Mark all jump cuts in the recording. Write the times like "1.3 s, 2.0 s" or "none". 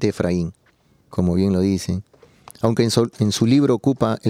1.1 s, 3.1 s